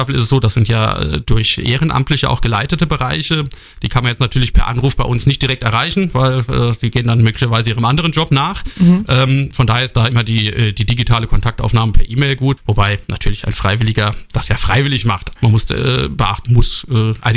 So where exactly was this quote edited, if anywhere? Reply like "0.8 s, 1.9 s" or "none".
12.6 s, 15.4 s, 16.4 s

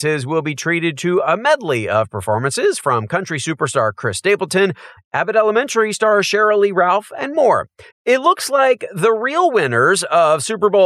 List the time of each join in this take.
5.0 s, 7.9 s

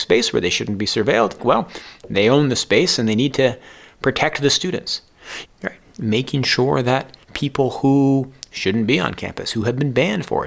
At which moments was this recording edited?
1.4 s, 5.4 s, 7.2 s

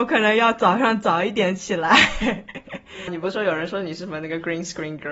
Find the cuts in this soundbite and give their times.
3.1 s

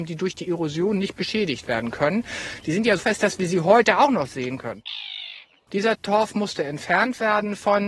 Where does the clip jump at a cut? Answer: 3.0 s, 5.7 s

